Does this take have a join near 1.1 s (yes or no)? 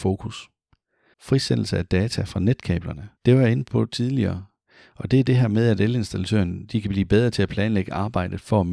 yes